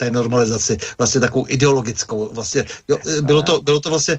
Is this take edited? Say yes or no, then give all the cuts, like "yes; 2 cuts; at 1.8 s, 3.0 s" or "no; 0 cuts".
no; 0 cuts